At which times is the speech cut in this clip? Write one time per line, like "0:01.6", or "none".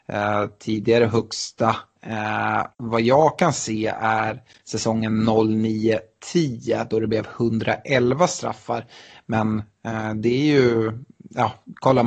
0:02.7